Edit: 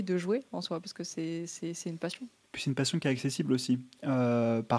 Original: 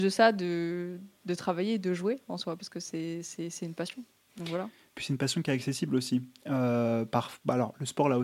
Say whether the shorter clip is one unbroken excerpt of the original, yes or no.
no